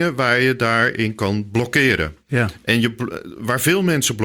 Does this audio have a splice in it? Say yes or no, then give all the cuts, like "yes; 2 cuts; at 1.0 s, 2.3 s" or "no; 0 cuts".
no; 0 cuts